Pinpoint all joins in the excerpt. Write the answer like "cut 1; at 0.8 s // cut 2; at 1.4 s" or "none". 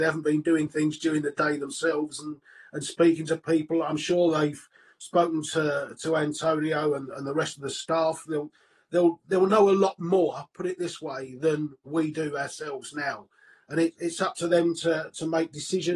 none